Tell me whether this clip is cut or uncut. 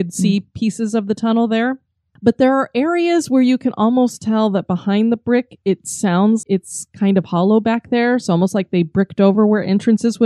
cut